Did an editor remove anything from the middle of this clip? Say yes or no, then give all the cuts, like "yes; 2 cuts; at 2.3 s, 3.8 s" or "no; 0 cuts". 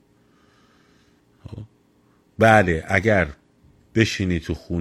no; 0 cuts